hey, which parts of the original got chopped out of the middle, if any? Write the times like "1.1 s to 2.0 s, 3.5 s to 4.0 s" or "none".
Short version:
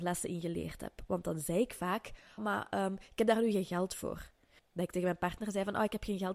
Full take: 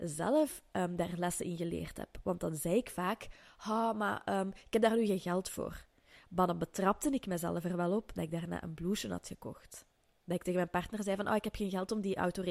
3.5 s to 3.9 s, 6.1 s to 10.1 s